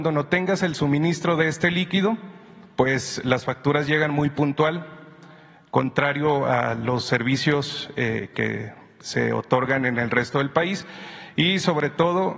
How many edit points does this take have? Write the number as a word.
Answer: zero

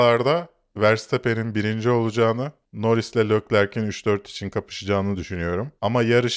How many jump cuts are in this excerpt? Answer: one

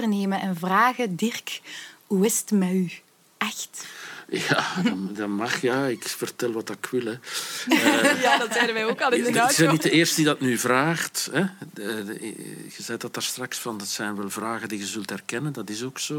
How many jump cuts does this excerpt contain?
zero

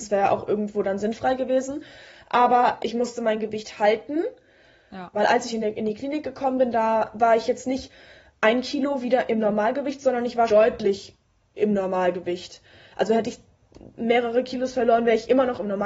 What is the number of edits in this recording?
three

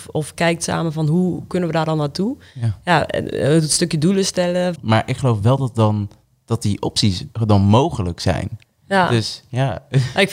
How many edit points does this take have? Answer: one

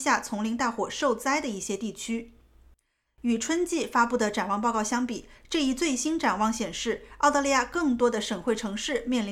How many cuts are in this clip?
one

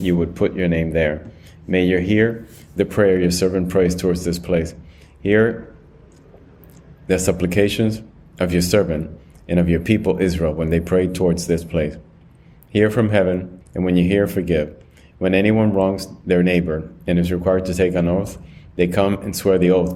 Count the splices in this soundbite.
one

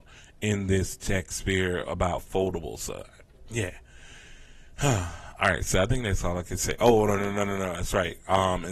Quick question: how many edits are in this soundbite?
zero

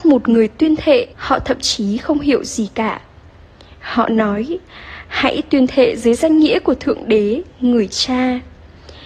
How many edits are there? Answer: one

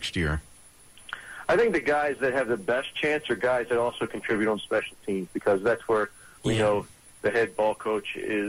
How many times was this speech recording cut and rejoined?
zero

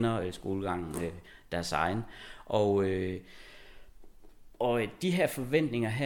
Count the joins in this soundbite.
zero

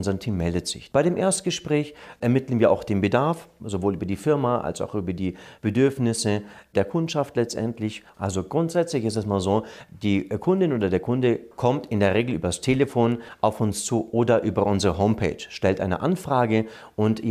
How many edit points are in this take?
three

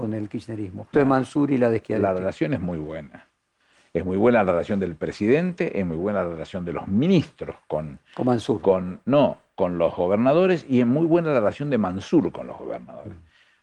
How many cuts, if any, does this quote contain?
one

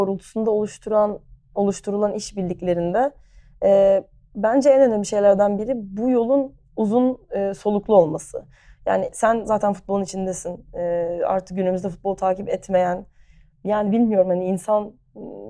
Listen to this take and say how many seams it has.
zero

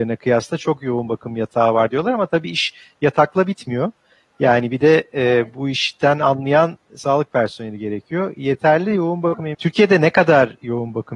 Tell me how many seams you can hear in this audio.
one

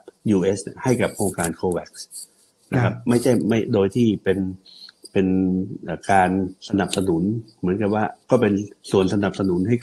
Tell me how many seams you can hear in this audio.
one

